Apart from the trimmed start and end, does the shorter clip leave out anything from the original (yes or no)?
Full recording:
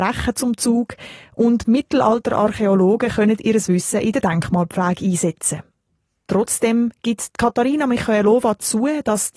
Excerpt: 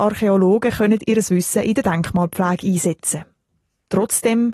no